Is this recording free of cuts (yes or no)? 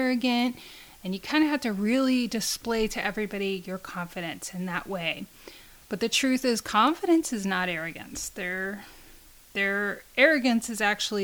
yes